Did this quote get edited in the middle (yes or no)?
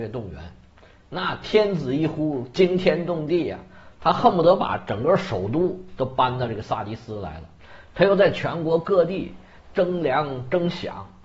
no